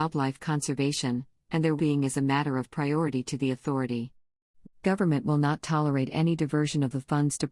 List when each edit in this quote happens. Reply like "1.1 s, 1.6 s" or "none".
1.8 s, 4.6 s